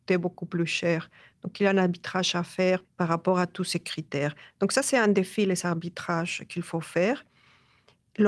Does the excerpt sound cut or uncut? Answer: cut